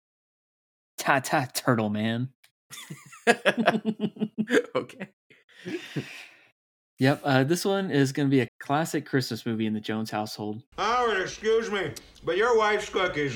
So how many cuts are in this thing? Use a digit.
2